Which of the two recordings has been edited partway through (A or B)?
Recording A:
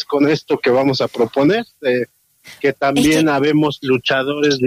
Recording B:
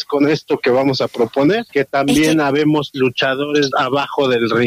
B